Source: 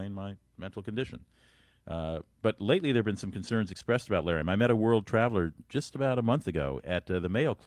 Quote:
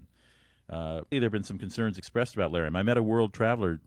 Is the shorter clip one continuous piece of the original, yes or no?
no